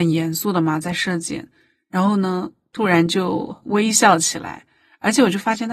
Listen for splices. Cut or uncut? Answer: uncut